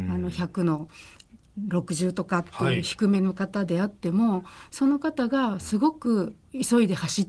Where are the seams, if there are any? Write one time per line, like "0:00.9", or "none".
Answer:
none